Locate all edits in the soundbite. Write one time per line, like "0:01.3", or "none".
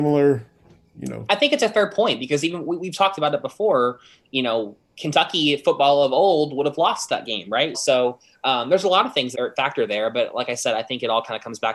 0:07.7
0:09.3